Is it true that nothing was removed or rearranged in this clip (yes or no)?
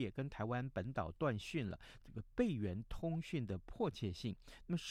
no